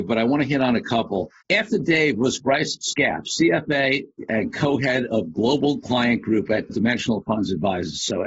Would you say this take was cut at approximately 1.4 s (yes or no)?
yes